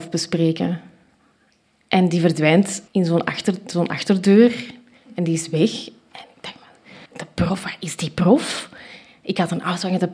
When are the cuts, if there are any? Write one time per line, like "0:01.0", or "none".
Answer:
0:02.9
0:07.1